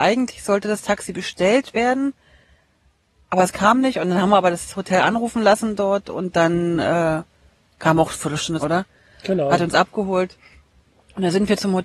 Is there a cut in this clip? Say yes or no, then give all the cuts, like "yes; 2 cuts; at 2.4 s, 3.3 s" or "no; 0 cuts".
yes; 1 cut; at 8.6 s